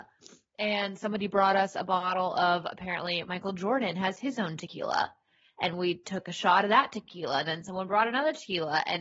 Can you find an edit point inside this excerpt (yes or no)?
no